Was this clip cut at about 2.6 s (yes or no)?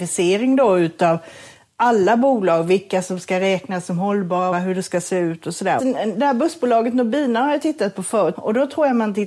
no